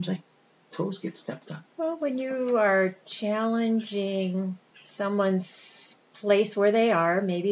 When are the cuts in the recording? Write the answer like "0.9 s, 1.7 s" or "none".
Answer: 1.7 s